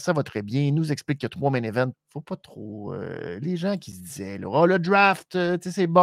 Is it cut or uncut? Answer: cut